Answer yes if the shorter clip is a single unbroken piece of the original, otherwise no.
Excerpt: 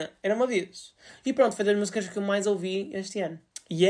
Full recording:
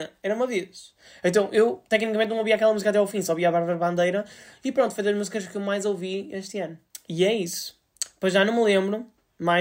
no